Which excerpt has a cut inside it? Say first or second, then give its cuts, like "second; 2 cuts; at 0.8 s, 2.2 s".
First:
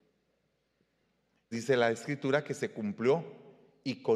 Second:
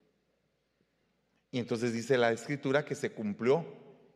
first; 1 cut; at 1.5 s